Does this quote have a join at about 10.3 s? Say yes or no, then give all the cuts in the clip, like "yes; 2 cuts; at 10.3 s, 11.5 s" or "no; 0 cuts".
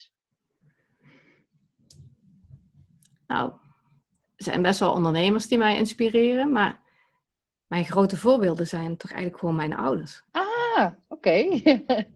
yes; 1 cut; at 10.3 s